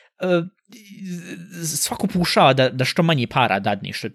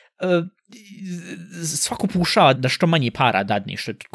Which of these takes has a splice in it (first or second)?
second